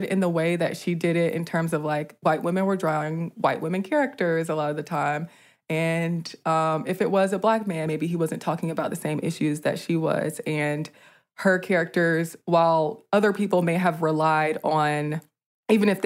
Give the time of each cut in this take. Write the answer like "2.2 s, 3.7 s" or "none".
none

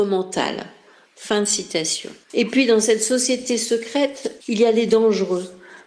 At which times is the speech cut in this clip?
2.2 s, 4.4 s

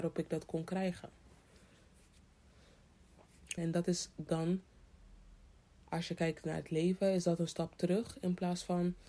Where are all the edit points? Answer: 3.6 s

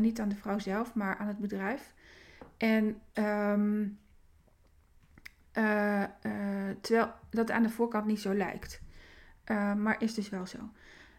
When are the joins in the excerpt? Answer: none

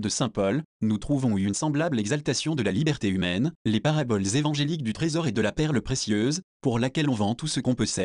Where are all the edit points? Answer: 3.6 s

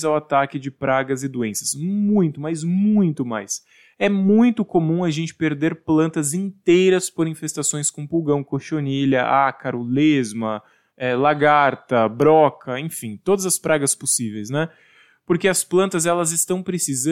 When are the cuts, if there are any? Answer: none

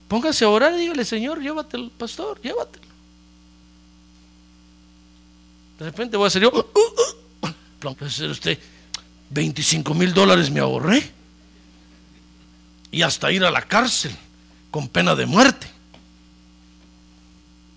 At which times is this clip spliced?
7.9 s

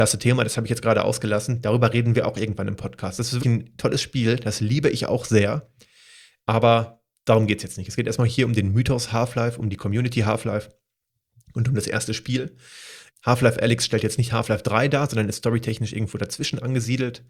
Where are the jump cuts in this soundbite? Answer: 3.4 s, 13.1 s

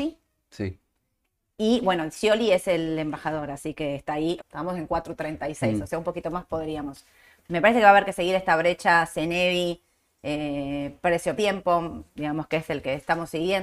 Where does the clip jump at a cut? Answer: 4.4 s, 11.4 s

